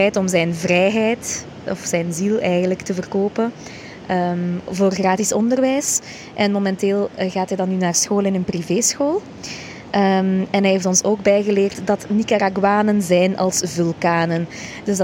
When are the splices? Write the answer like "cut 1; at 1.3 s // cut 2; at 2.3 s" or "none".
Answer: none